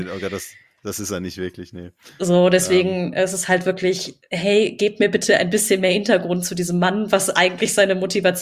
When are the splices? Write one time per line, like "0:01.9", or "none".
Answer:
none